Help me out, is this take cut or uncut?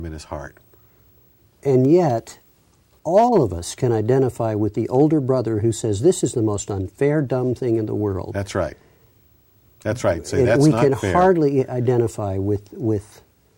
uncut